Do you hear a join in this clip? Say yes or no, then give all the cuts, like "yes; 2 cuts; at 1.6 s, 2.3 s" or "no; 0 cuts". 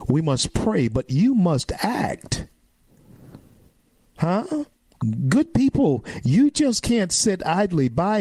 no; 0 cuts